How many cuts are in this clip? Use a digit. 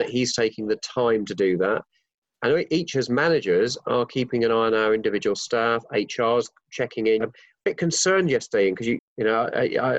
2